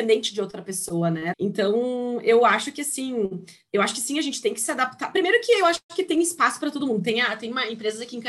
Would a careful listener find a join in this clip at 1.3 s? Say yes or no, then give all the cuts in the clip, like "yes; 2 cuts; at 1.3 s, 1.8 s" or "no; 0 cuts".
yes; 1 cut; at 1.3 s